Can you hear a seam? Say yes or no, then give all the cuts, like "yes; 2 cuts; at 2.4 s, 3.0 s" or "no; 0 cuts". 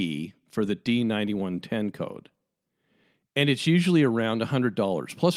no; 0 cuts